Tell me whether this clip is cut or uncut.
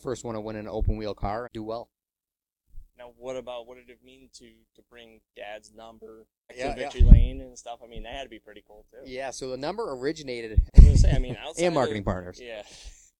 cut